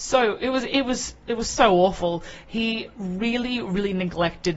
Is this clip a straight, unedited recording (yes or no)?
yes